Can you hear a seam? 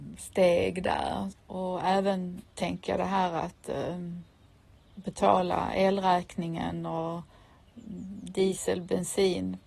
yes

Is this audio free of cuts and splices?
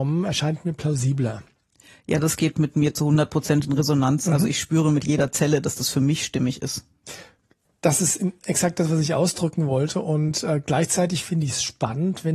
yes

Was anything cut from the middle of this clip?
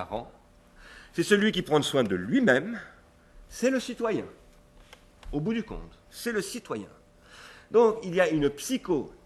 yes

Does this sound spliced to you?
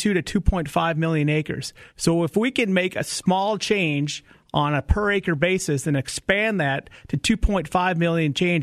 no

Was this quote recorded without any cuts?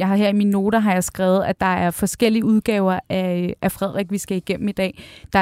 yes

